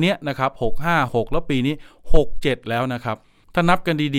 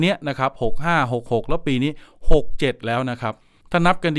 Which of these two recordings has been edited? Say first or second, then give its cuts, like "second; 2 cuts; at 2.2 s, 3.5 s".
first; 1 cut; at 1.1 s